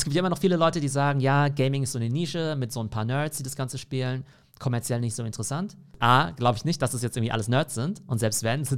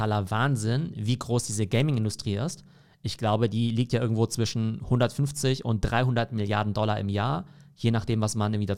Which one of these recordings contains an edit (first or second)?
first